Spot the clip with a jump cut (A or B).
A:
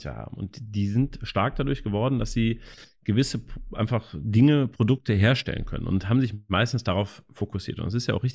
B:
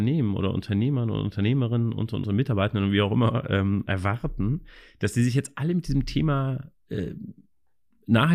B